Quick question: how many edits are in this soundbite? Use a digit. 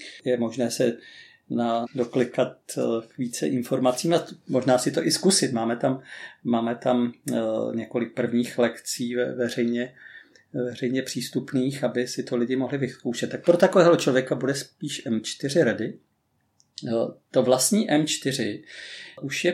1